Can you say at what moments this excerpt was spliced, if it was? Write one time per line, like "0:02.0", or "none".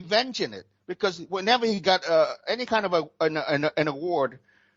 none